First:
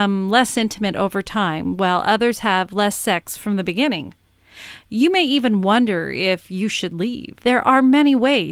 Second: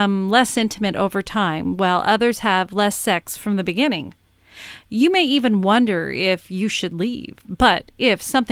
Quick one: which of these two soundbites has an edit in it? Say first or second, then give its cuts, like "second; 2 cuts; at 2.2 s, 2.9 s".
first; 1 cut; at 7.4 s